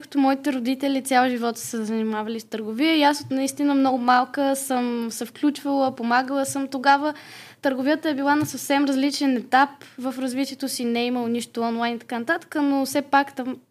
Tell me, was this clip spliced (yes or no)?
no